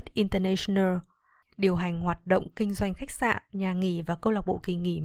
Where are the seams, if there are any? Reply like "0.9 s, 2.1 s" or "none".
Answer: 1.4 s